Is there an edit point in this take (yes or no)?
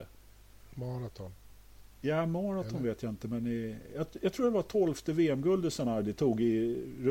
no